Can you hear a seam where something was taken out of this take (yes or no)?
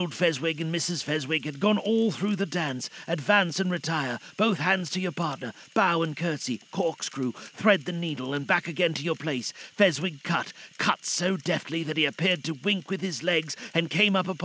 no